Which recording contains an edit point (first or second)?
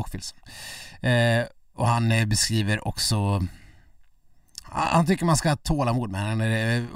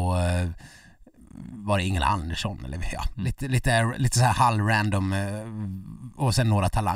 first